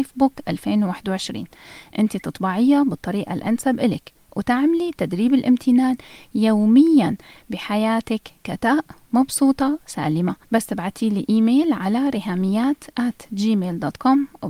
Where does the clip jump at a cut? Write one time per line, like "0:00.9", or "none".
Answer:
0:10.4